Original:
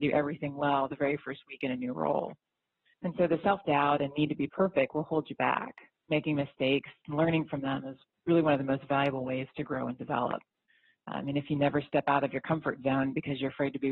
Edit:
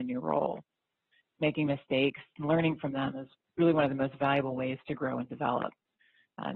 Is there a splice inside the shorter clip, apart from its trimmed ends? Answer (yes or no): yes